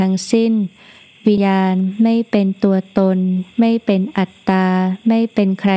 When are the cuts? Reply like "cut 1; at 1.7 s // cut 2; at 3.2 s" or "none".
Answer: cut 1; at 1.4 s

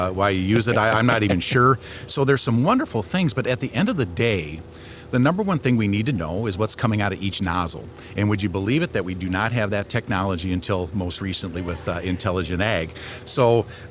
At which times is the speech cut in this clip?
none

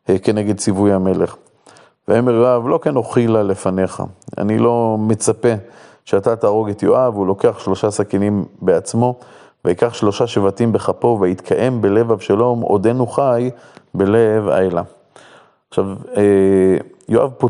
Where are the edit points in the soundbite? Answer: none

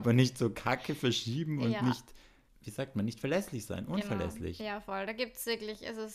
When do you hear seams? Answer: cut 1; at 2.5 s

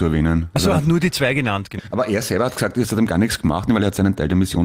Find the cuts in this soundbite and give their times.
cut 1; at 1.8 s // cut 2; at 3.7 s

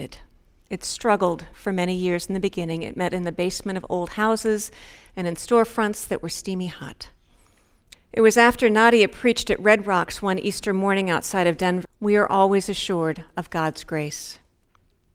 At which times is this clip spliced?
cut 1; at 7.9 s // cut 2; at 11.8 s

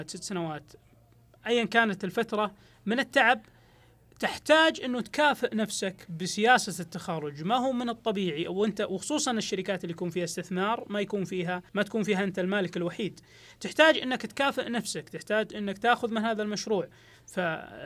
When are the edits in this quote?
cut 1; at 11.7 s

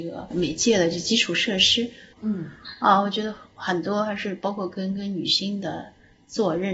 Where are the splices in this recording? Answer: cut 1; at 2.1 s

